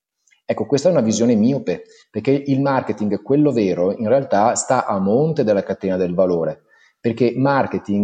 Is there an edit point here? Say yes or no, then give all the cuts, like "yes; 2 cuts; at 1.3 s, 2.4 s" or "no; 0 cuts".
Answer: no; 0 cuts